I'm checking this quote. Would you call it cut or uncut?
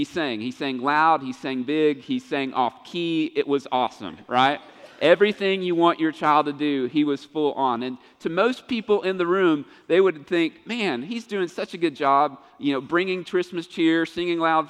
uncut